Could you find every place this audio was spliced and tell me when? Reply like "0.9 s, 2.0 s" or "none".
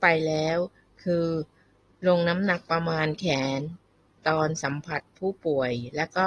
none